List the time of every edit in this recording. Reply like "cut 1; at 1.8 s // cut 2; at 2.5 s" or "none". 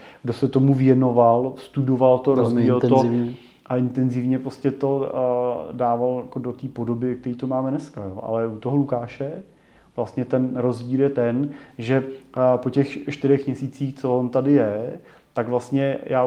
none